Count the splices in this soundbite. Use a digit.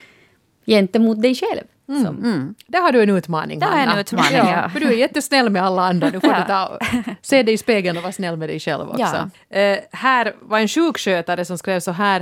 1